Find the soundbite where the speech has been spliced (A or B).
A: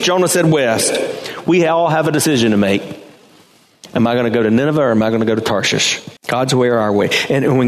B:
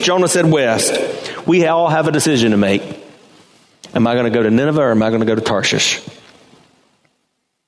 A